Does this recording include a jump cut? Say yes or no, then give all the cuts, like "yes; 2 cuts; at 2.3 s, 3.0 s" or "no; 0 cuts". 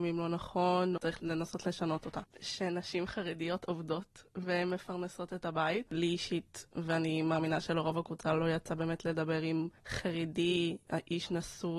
yes; 2 cuts; at 2.2 s, 5.9 s